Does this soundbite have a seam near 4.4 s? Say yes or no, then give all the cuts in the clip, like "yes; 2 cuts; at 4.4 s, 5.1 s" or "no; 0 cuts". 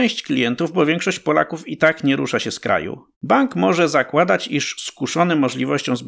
no; 1 cut; at 3.1 s